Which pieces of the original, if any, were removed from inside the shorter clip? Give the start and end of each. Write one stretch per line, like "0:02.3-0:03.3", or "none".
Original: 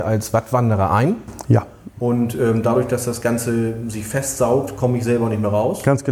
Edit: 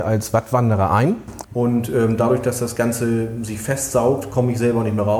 0:01.4-0:01.9